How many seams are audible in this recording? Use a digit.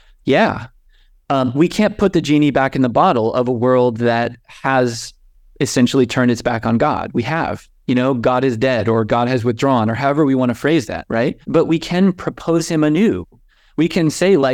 1